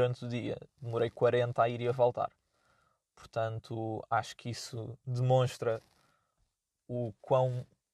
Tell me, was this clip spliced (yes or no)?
no